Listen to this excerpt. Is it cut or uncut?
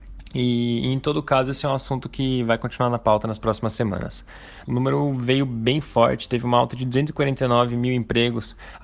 cut